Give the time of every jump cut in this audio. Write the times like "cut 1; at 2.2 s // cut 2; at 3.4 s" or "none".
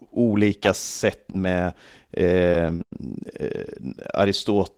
cut 1; at 1.3 s